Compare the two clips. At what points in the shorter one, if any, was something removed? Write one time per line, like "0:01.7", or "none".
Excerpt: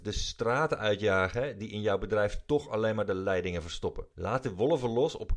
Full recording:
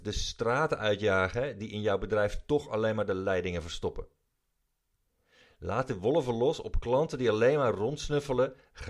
0:04.1